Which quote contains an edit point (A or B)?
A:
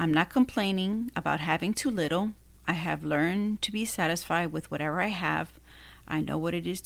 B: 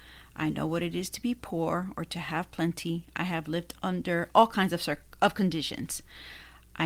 B